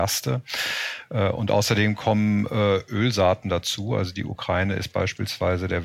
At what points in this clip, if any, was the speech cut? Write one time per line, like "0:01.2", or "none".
none